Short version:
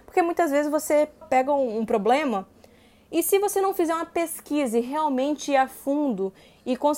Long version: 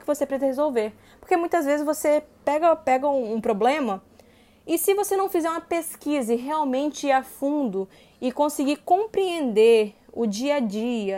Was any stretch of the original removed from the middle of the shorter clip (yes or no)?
yes